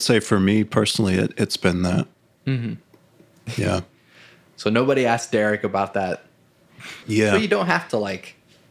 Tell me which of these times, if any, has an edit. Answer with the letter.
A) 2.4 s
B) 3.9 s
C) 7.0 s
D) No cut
C